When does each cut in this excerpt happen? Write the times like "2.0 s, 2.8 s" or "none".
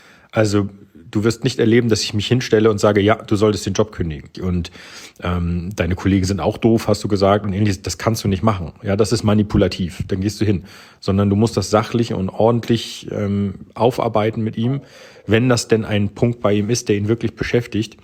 4.3 s